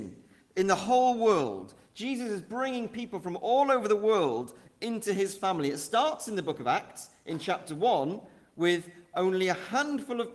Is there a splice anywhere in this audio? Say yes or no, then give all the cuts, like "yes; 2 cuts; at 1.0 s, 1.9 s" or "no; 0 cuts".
no; 0 cuts